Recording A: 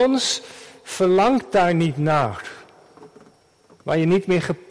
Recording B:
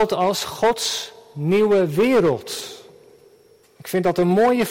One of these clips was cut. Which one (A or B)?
A